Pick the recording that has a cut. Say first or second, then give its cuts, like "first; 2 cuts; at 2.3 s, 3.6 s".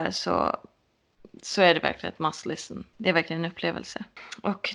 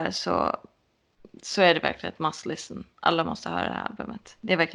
first; 1 cut; at 2.9 s